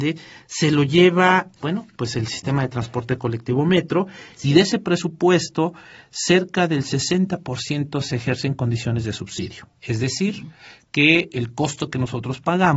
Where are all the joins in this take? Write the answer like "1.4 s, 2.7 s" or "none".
1.6 s, 9.8 s